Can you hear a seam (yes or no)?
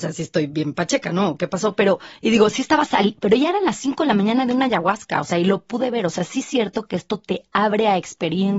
no